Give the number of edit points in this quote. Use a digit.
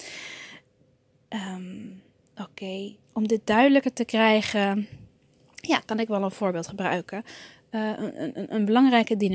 1